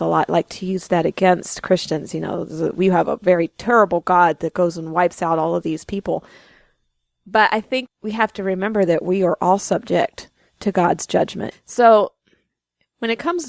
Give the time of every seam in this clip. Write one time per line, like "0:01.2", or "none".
0:07.9
0:11.5